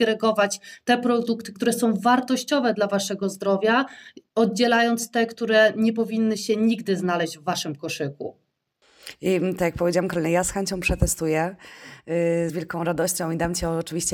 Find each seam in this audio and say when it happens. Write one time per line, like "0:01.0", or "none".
0:12.5